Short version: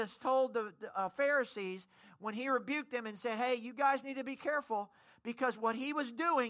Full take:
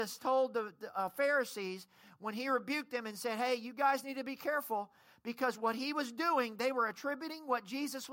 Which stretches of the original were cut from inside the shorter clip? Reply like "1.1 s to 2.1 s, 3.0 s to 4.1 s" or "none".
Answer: none